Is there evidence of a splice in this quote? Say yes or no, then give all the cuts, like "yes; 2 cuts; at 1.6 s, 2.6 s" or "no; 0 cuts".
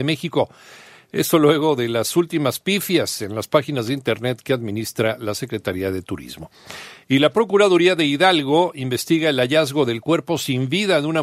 no; 0 cuts